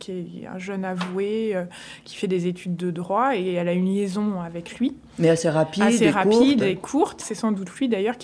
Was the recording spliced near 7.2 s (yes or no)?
yes